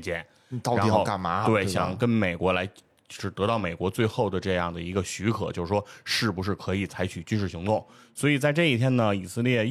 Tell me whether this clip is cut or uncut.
uncut